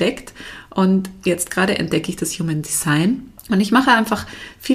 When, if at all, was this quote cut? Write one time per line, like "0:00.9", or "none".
0:03.4